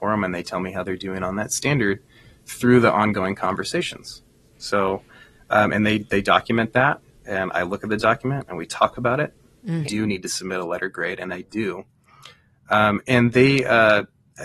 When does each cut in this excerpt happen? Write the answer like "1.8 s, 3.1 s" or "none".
9.8 s